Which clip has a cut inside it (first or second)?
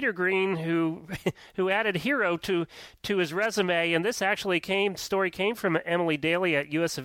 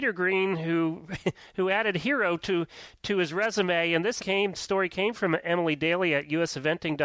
second